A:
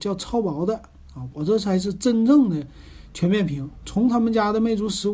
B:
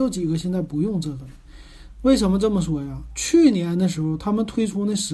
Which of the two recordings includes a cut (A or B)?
B